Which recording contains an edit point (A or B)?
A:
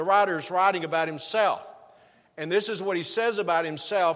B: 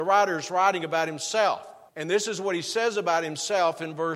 B